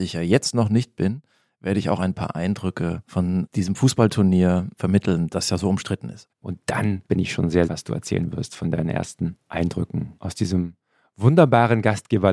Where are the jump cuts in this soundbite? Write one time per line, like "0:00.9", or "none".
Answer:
0:06.3
0:07.7